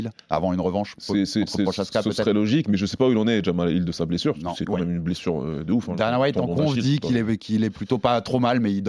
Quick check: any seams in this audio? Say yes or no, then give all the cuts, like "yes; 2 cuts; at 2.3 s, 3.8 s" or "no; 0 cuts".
no; 0 cuts